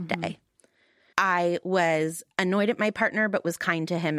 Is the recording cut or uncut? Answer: cut